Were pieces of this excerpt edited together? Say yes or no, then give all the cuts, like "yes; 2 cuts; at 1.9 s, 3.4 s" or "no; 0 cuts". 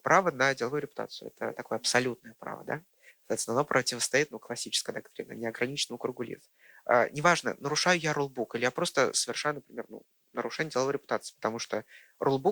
no; 0 cuts